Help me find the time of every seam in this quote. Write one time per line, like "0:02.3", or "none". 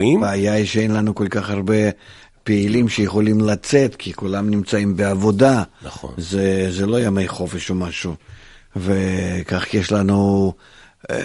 none